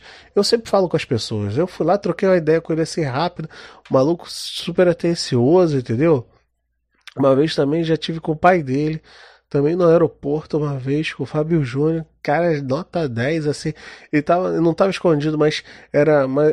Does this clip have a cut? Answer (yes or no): no